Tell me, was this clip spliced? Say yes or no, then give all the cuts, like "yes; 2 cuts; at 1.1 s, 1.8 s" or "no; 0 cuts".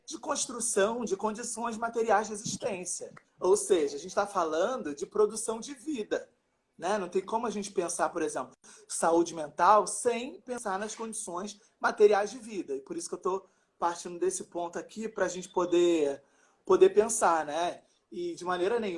yes; 1 cut; at 3.2 s